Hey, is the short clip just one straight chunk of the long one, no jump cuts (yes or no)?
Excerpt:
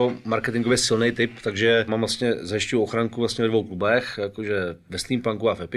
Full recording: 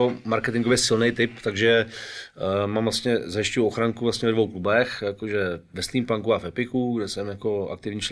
no